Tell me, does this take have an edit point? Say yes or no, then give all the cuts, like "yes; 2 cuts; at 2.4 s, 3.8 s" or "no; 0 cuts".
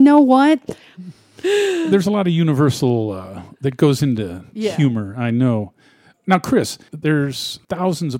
yes; 1 cut; at 0.9 s